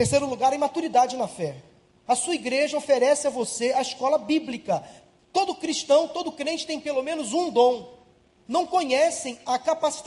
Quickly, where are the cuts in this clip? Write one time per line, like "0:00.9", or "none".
0:02.1
0:05.2
0:08.5